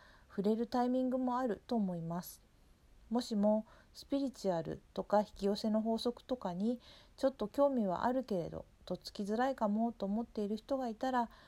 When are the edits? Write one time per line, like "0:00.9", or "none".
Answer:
none